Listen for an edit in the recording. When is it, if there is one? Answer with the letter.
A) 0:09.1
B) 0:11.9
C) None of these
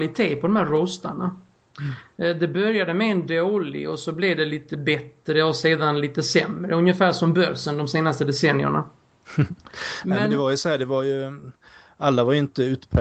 C